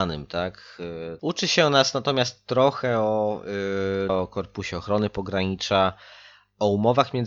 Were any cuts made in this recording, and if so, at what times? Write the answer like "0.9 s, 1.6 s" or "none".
1.2 s, 4.1 s